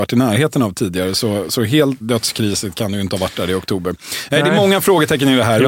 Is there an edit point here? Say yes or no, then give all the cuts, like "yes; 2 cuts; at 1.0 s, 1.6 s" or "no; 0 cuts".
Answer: yes; 1 cut; at 2.0 s